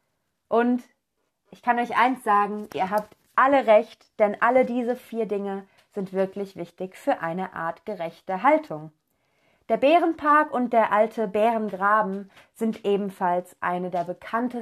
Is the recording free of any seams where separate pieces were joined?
yes; 0 cuts

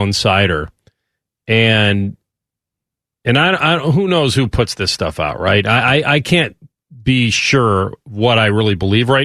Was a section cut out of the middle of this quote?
no; 0 cuts

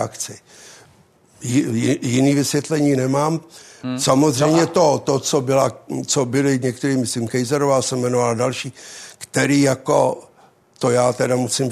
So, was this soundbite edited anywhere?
no; 0 cuts

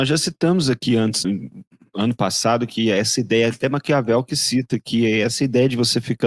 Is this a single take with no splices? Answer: no; 1 cut; at 1.2 s

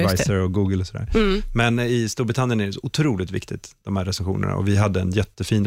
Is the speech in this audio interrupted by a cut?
no; 0 cuts

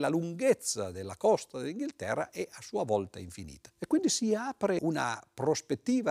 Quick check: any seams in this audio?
yes; 2 cuts; at 3.7 s, 4.8 s

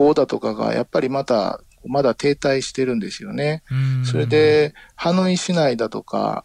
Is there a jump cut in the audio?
no; 0 cuts

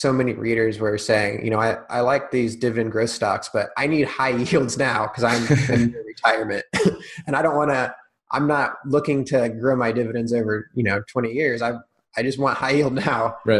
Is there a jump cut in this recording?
no; 0 cuts

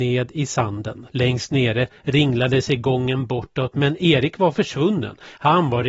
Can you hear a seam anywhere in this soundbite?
yes; 1 cut; at 1.1 s

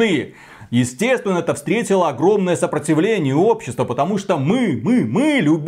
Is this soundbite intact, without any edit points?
yes; 0 cuts

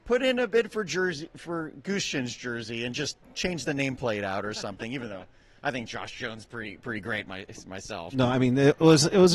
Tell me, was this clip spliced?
yes; 1 cut; at 8.1 s

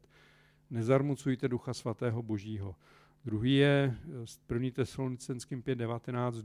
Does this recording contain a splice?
no; 0 cuts

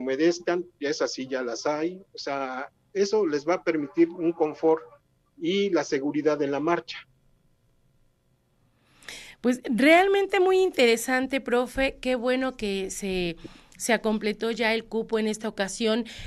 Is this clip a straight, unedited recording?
yes; 0 cuts

